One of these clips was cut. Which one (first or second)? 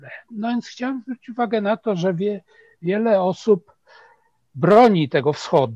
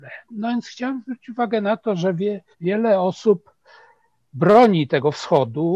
second